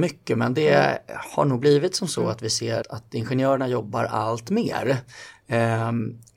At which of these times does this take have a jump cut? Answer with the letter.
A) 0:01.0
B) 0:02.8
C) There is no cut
B